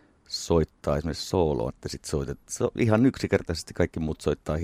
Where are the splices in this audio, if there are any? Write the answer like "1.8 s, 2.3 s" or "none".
1.7 s

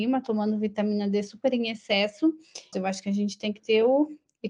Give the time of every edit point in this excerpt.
2.7 s

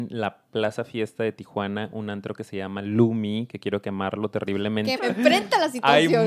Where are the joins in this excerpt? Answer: 5.0 s

